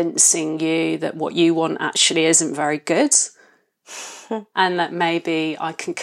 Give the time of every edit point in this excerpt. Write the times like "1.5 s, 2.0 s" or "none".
none